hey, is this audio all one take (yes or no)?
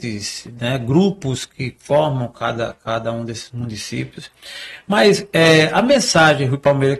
yes